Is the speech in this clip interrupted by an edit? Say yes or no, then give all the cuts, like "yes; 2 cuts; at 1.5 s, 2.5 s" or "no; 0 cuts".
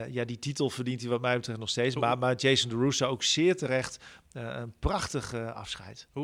no; 0 cuts